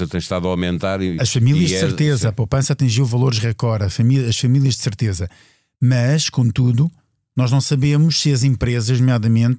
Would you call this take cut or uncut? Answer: uncut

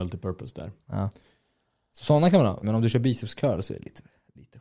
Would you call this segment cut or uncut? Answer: cut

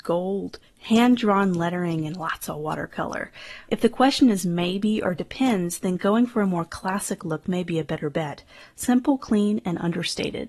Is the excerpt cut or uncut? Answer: cut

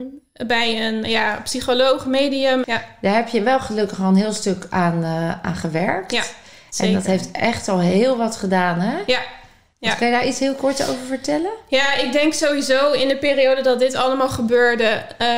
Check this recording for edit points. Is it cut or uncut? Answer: cut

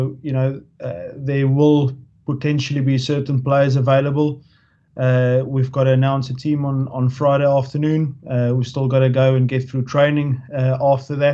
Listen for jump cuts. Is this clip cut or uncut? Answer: uncut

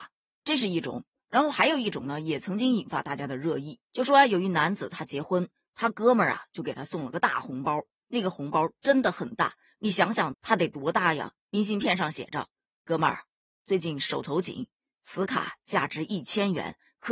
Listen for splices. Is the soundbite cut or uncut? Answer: cut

